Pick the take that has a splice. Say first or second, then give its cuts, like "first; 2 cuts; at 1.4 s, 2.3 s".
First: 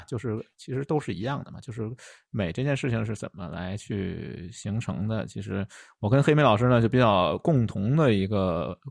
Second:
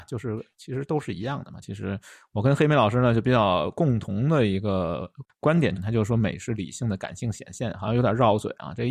second; 2 cuts; at 1.6 s, 5.8 s